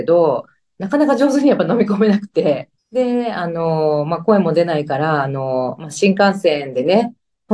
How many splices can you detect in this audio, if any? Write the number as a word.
one